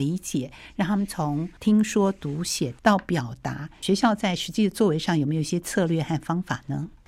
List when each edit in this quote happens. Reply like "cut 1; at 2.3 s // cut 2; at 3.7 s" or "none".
none